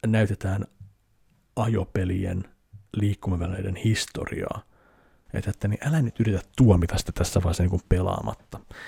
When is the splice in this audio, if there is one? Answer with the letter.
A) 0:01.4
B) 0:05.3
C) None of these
B